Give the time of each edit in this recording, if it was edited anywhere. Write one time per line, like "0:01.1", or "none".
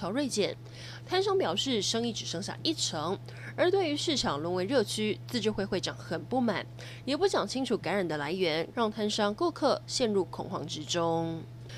0:07.0
0:08.7